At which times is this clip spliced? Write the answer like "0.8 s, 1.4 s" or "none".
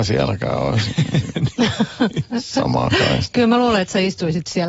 none